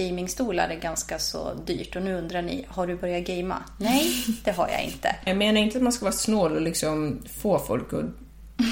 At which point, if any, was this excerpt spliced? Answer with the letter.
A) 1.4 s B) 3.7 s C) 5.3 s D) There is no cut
C